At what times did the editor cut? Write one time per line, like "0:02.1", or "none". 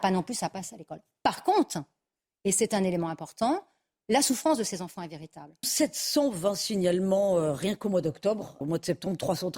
0:05.6
0:08.6